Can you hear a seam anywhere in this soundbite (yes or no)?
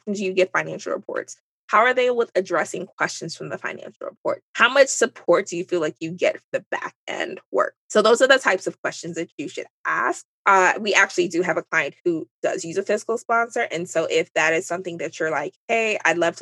no